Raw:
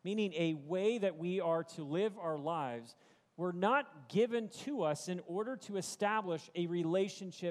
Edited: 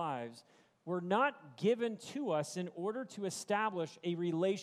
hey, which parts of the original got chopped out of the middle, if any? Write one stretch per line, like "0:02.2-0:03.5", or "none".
none